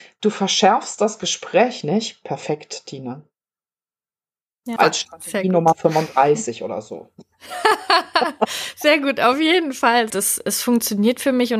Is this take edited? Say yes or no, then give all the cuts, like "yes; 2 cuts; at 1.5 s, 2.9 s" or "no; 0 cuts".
yes; 2 cuts; at 4.8 s, 10.1 s